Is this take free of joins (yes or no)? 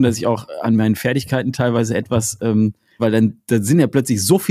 no